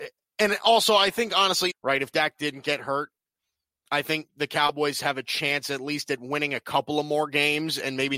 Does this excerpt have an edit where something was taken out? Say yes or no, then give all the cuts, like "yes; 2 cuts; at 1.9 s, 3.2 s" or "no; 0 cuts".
yes; 1 cut; at 1.7 s